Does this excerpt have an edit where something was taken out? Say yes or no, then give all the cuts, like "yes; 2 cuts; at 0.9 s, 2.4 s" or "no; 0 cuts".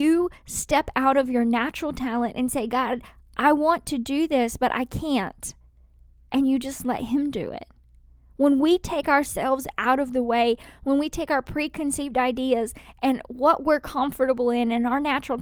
no; 0 cuts